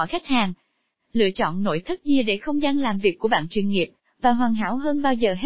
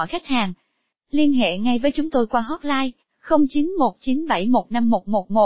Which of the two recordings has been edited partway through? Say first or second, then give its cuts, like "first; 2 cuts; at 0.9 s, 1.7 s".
second; 1 cut; at 0.9 s